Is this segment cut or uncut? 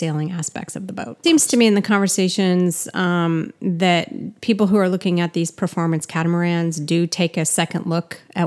cut